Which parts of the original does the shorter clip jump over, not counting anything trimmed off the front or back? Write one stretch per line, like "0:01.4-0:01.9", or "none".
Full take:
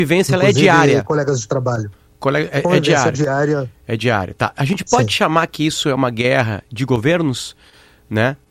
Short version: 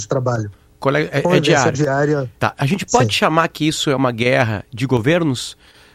0:03.8-0:04.4